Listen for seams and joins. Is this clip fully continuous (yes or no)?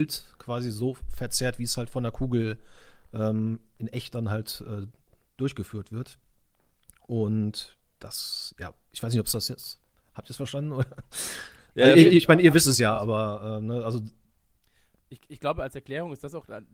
yes